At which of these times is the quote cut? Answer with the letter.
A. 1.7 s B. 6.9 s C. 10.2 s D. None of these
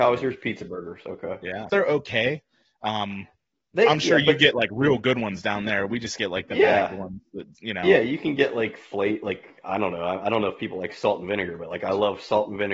A